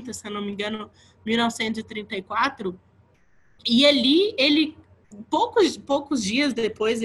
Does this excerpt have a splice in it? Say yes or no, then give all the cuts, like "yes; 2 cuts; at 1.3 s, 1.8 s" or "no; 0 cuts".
no; 0 cuts